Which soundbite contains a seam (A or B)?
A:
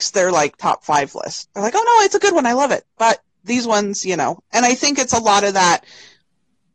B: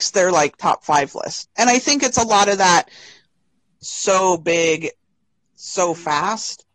B